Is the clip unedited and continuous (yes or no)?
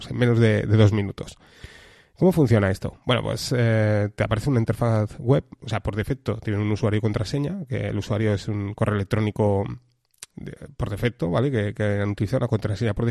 yes